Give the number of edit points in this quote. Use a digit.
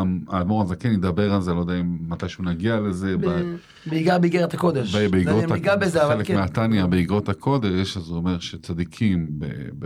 0